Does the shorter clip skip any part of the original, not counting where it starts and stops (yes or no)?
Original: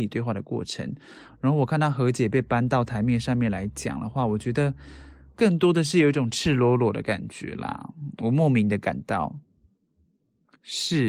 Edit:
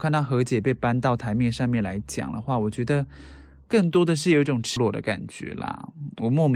yes